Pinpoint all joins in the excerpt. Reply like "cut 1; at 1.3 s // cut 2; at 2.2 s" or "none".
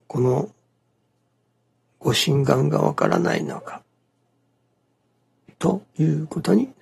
none